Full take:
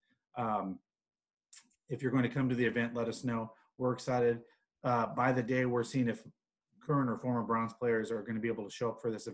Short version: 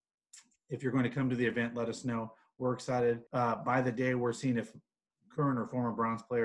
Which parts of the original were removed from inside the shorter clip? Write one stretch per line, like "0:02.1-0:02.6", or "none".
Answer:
0:04.5-0:04.8